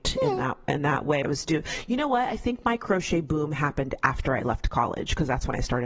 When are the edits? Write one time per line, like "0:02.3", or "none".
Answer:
0:01.2

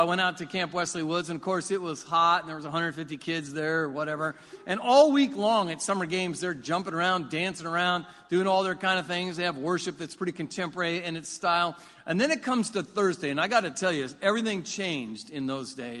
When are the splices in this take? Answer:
none

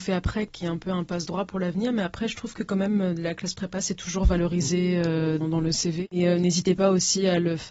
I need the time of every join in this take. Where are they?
0:05.4

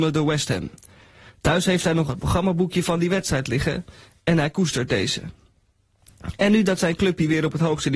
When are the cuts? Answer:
none

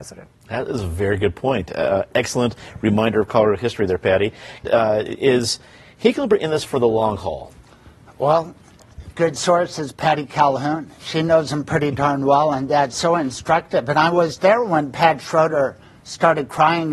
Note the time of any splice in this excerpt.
0:04.6

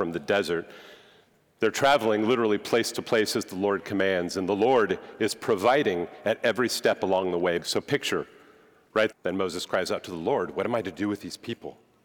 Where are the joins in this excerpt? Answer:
0:07.6
0:09.1

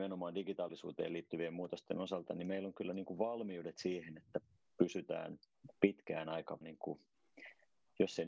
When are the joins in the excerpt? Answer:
0:06.6

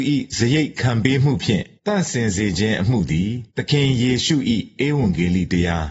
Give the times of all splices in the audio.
0:01.8
0:03.5

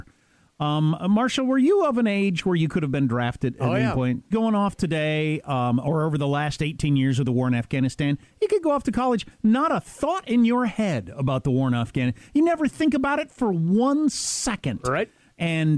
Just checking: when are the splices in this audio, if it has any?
0:04.3

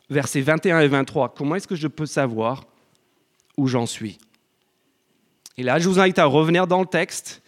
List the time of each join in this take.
none

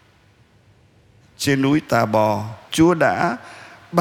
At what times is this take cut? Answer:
0:02.7

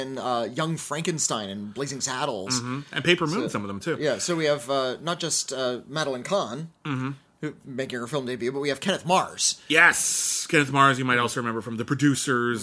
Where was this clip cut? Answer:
none

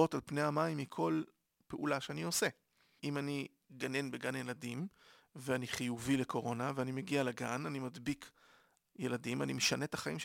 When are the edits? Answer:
0:03.0

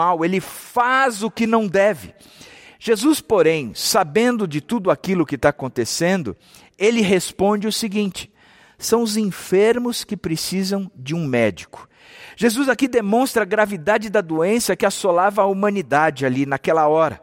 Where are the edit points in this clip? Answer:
none

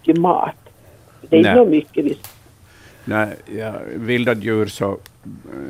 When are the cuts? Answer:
none

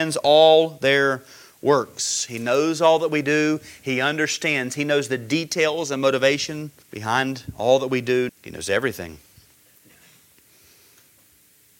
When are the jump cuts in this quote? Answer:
0:06.8
0:08.3

